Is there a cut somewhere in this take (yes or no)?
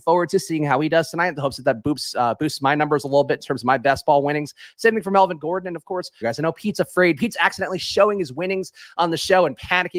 yes